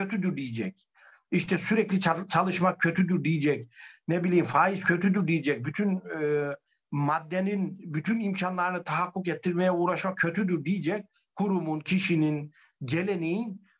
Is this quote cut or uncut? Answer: uncut